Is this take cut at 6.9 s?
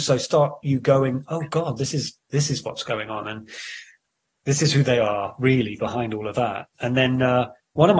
no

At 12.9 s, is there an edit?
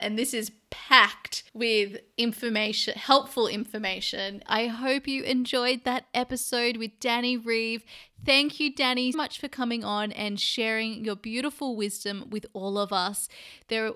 no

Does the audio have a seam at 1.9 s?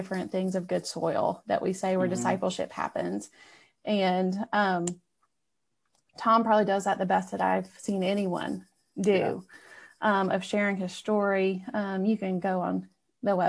no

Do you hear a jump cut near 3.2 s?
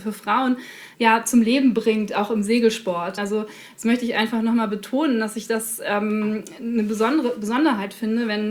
yes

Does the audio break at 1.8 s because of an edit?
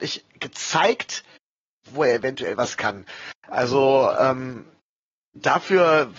yes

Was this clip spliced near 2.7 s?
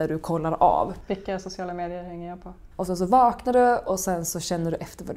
yes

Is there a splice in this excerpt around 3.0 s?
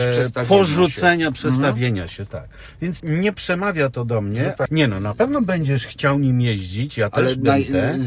yes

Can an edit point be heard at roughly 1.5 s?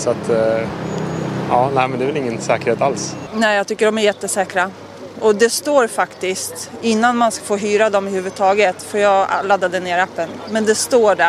no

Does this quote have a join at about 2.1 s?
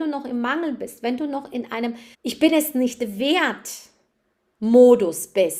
yes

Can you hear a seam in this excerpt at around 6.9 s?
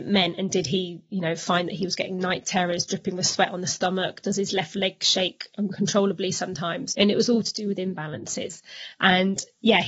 yes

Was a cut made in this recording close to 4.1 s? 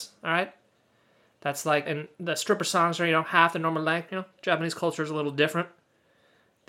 yes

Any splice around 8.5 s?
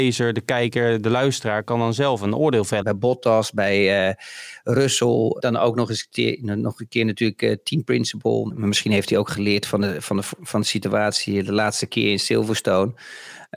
yes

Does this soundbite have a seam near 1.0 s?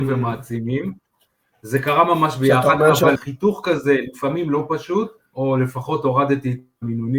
no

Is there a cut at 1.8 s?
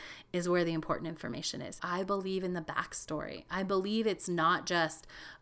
yes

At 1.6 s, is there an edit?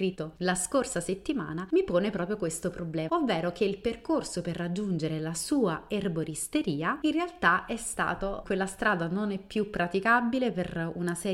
no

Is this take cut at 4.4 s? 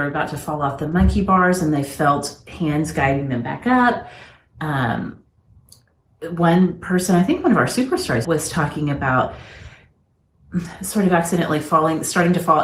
no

